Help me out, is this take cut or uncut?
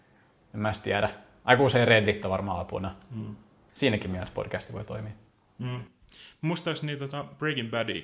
cut